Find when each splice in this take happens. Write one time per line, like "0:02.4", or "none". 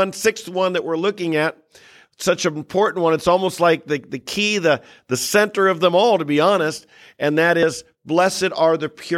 none